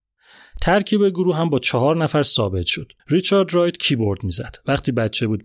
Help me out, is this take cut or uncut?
cut